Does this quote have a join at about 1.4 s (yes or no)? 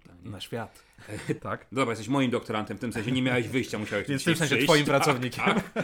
yes